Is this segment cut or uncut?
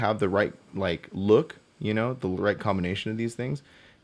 uncut